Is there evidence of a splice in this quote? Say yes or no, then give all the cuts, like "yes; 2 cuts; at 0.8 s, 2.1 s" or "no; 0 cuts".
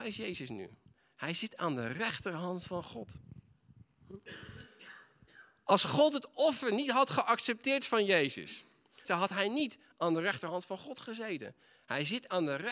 yes; 1 cut; at 9.0 s